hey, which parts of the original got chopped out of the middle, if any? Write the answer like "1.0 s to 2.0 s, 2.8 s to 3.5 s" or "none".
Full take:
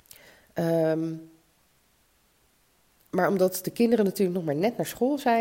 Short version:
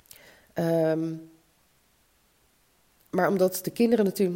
none